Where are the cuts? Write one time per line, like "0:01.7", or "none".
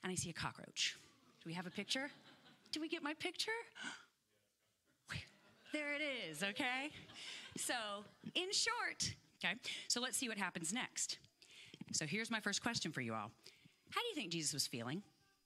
0:09.3
0:11.8